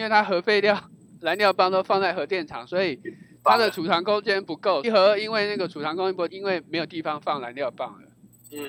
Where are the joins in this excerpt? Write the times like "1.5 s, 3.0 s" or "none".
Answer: 4.8 s, 6.3 s